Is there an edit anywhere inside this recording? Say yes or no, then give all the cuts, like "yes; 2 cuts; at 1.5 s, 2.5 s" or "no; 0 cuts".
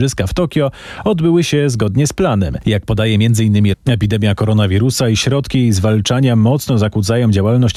yes; 1 cut; at 3.7 s